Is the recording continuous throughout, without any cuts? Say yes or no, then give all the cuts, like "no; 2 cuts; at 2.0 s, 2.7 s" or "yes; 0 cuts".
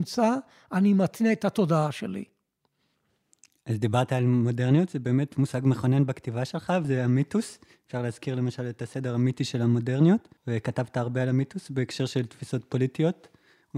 no; 2 cuts; at 6.8 s, 10.4 s